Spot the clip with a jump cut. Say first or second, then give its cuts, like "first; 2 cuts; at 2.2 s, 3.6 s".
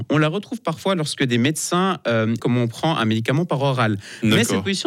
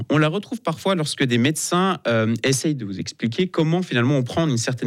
first; 1 cut; at 2.4 s